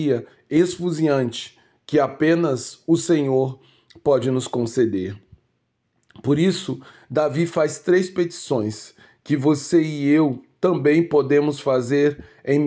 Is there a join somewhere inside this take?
no; 0 cuts

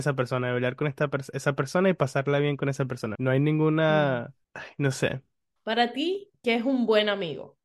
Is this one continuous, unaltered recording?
no; 2 cuts; at 3.1 s, 5.6 s

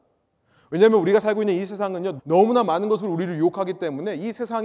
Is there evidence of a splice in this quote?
yes; 1 cut; at 2.2 s

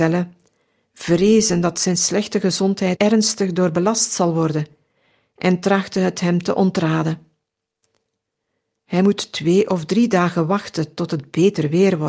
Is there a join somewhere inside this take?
yes; 1 cut; at 3.0 s

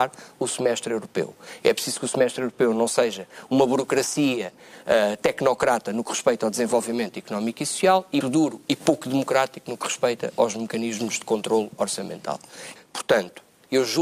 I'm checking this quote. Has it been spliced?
yes; 2 cuts; at 8.2 s, 12.8 s

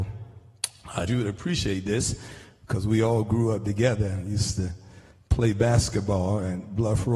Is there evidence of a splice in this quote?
yes; 1 cut; at 1.1 s

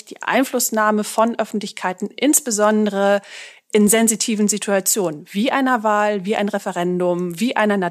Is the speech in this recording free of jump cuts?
yes; 0 cuts

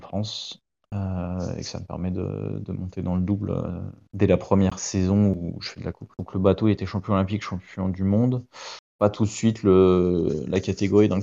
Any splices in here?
yes; 1 cut; at 6.1 s

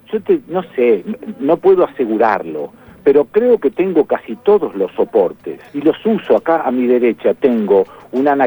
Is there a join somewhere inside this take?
yes; 1 cut; at 5.7 s

